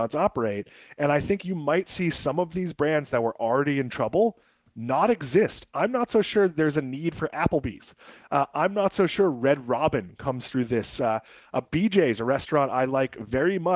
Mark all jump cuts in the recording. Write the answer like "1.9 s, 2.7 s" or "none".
none